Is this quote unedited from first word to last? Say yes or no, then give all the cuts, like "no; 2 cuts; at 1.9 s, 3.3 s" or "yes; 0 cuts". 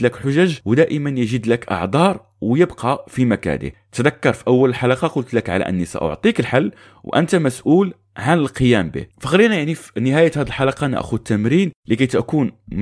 no; 1 cut; at 9.1 s